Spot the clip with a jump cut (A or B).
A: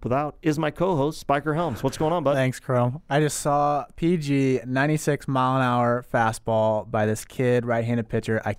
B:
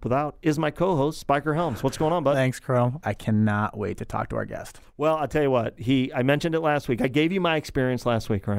B